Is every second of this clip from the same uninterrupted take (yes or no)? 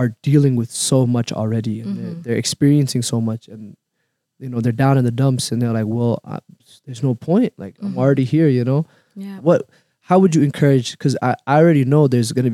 no